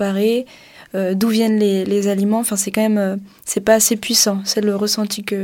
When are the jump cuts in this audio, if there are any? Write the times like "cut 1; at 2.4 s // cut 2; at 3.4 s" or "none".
none